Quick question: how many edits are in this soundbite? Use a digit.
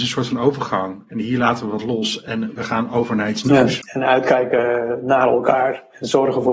1